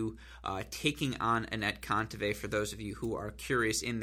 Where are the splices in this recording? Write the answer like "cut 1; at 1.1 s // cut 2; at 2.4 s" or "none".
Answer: none